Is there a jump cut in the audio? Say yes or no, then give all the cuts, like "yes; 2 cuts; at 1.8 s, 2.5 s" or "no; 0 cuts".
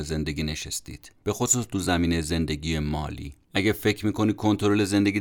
yes; 2 cuts; at 1.2 s, 3.4 s